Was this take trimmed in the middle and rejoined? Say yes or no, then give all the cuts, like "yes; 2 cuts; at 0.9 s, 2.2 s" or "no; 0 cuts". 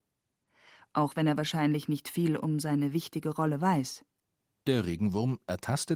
no; 0 cuts